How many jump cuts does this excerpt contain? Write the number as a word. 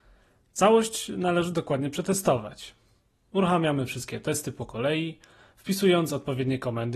zero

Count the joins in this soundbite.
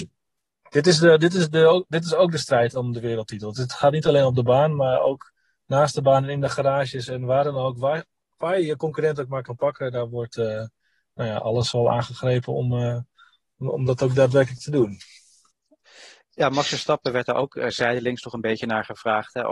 zero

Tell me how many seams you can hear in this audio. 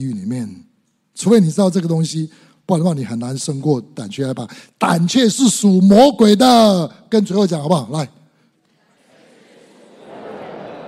zero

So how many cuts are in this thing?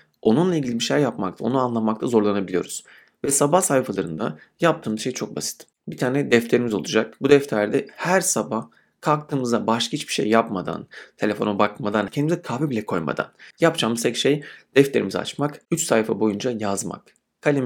two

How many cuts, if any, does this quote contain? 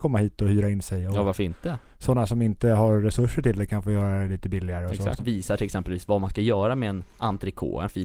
one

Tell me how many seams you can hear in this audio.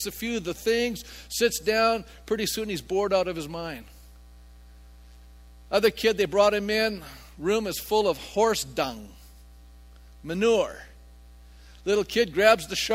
zero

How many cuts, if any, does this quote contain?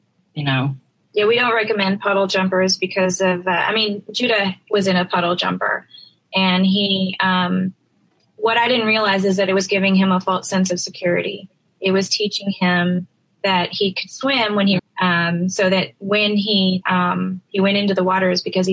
two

